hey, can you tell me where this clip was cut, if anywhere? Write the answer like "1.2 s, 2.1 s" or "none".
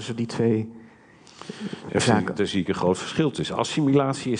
none